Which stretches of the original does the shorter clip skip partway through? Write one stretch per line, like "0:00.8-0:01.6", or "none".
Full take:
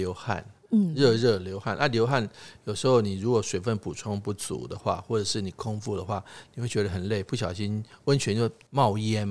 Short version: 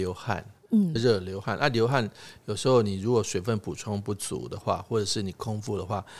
0:01.0-0:01.1